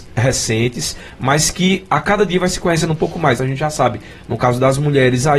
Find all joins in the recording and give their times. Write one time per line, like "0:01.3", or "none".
none